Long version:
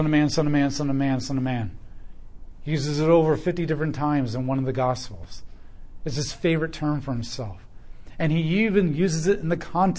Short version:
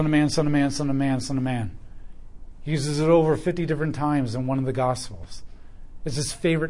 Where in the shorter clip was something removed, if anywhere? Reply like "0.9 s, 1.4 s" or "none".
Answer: none

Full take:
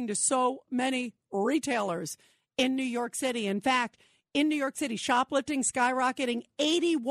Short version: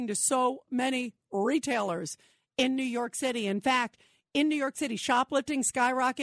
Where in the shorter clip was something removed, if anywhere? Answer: none

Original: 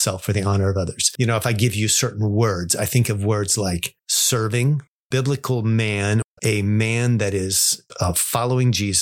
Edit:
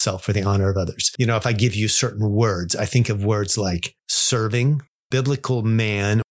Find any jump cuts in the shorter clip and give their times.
none

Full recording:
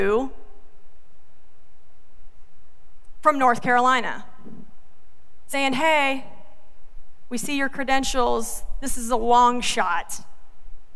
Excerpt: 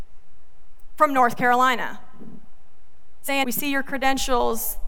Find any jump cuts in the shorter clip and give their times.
3.4 s

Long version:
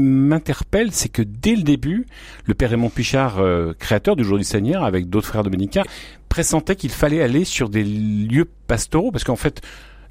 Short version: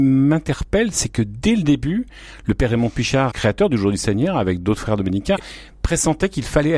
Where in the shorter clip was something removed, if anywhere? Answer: 3.3 s

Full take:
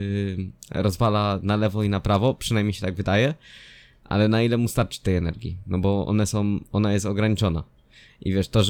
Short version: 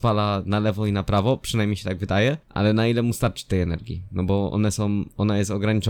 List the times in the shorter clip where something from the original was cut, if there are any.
2.4 s

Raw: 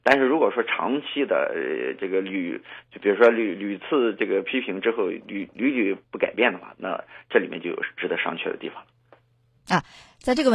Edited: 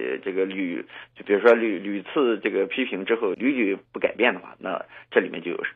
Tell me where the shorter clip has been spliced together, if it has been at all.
3.3 s

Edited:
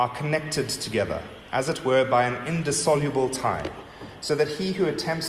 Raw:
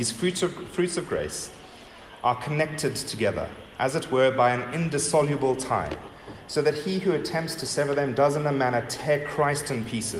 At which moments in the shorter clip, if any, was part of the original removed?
none

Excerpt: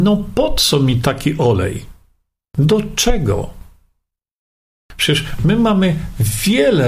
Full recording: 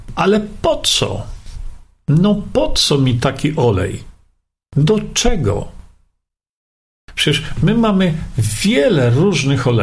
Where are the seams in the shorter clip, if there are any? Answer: none

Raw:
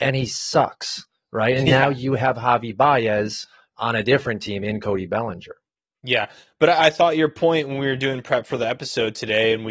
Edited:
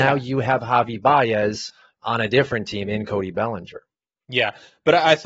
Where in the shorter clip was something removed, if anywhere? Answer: none

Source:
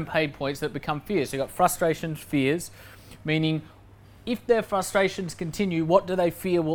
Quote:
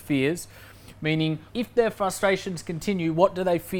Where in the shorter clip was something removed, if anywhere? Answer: 1.5 s

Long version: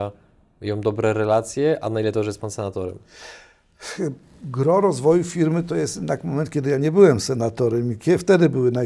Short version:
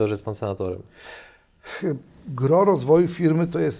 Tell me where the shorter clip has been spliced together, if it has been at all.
none

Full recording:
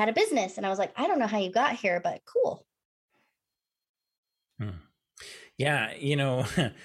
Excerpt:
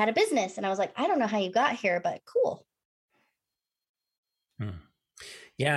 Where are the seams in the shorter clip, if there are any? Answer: none

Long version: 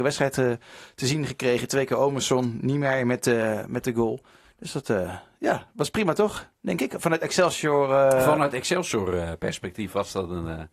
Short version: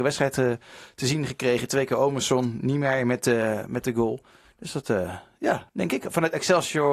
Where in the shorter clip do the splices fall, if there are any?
5.7 s

